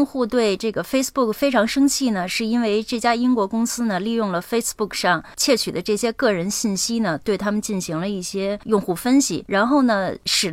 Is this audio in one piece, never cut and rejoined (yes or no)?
yes